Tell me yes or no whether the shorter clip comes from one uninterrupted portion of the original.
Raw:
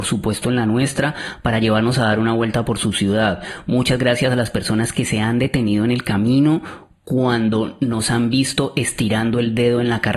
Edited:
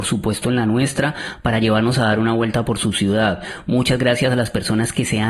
yes